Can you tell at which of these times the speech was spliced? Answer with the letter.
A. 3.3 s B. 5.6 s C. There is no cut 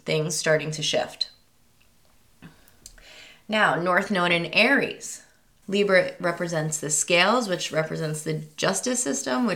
B